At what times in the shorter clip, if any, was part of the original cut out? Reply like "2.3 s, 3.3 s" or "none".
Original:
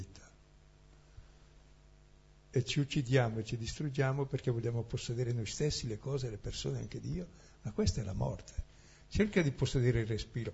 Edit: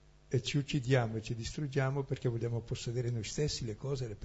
none